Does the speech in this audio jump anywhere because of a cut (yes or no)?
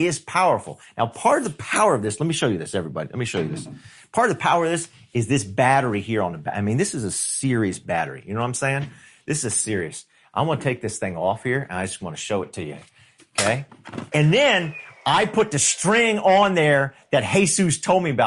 yes